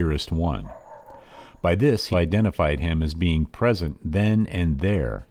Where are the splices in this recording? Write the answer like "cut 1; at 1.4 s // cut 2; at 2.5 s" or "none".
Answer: cut 1; at 2.1 s